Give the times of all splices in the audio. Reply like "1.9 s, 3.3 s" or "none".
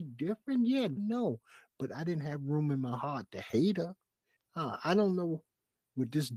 1.0 s, 4.4 s